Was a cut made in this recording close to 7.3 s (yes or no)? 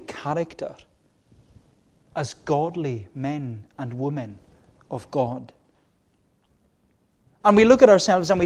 yes